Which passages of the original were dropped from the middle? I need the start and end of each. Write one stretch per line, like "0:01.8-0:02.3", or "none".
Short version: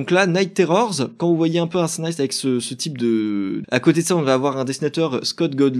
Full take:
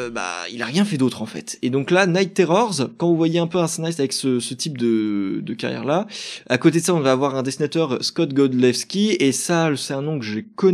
0:05.4-0:06.4